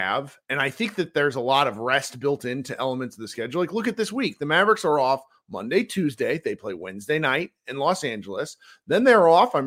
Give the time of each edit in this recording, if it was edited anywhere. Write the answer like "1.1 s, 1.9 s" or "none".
none